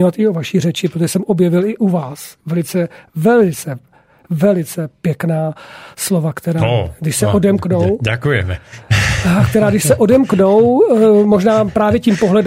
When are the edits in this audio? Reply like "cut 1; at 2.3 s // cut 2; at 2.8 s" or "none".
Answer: none